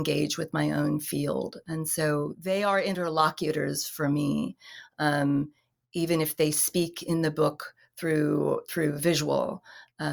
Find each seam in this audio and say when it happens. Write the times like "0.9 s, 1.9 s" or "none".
none

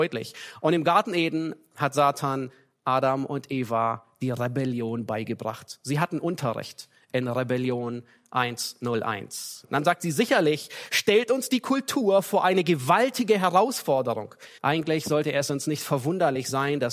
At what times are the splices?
9.6 s, 14.6 s

